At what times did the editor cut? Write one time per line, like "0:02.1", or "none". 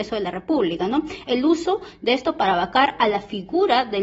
0:01.3